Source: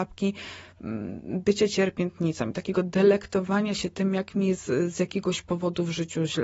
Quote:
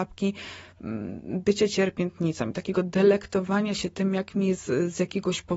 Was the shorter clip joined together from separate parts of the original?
no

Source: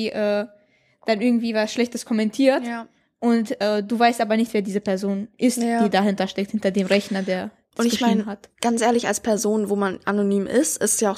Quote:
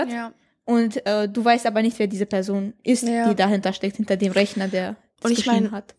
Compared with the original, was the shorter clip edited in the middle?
no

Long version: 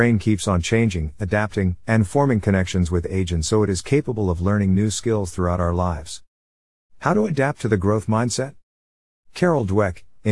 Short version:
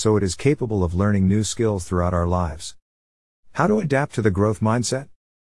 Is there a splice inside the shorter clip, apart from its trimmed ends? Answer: no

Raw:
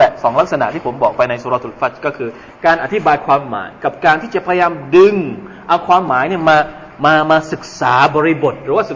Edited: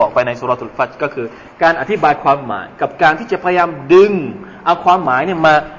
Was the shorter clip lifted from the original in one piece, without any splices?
yes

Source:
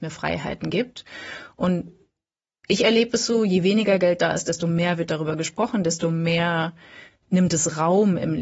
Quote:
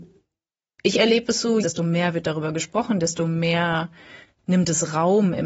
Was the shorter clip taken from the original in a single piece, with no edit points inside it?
no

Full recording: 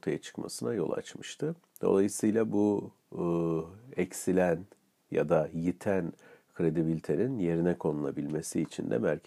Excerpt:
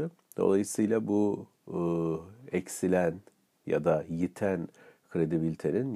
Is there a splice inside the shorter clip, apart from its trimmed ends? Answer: no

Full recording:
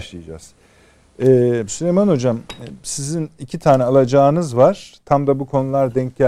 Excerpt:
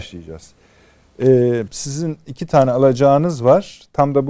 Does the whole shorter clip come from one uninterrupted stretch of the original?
no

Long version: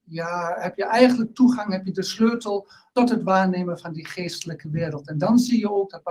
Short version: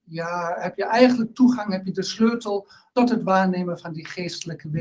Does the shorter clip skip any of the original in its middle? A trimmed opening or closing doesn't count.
no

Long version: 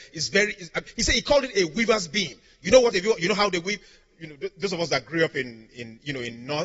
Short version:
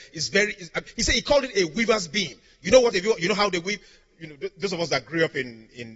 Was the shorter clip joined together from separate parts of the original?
no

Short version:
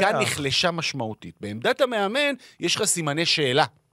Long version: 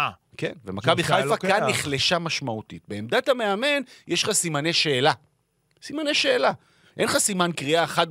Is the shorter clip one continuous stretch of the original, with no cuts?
yes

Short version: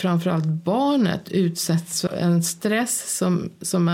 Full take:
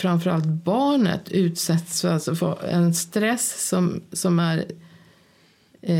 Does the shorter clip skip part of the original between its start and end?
yes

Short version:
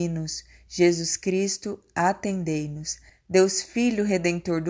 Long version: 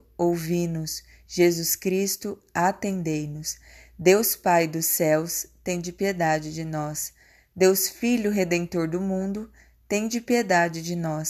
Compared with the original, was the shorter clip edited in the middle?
yes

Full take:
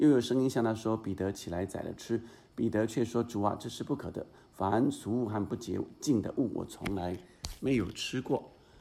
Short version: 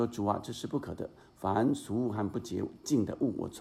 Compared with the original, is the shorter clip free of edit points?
yes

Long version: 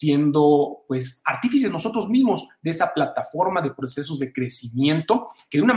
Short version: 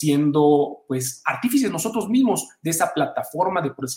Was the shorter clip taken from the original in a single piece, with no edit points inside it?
yes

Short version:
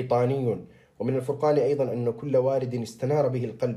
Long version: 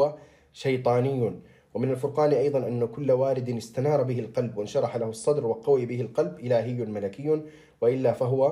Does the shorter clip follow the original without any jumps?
yes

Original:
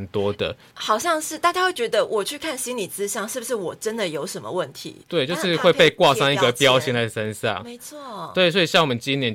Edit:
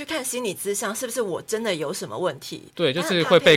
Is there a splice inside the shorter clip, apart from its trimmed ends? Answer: no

